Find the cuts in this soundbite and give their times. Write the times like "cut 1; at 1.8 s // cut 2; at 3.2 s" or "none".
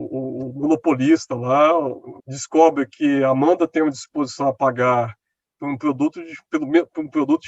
cut 1; at 2.2 s